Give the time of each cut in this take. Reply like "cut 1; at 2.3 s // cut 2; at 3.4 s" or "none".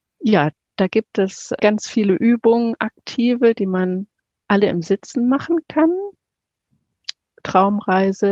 cut 1; at 1.6 s